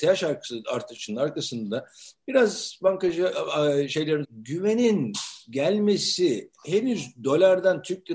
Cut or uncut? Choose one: cut